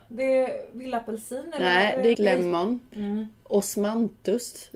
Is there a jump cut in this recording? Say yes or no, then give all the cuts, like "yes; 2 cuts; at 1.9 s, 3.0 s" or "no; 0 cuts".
yes; 1 cut; at 2.1 s